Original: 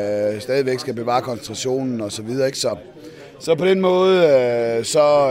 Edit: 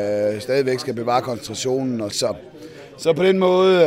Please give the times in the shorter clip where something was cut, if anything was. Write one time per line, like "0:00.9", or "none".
0:02.1